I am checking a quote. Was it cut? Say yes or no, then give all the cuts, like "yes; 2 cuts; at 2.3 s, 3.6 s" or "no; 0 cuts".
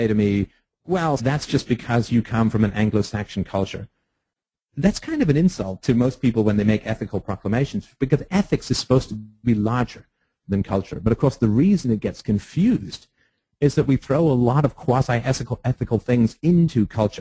yes; 1 cut; at 1.2 s